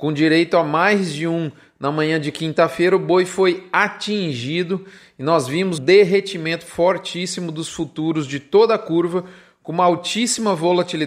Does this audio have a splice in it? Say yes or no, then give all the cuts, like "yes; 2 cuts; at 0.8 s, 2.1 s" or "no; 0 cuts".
yes; 1 cut; at 5.8 s